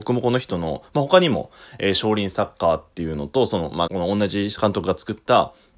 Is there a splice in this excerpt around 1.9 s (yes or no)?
no